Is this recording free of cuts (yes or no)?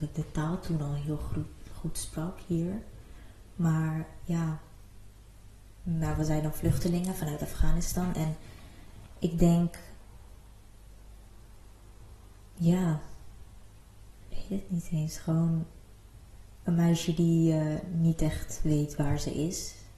yes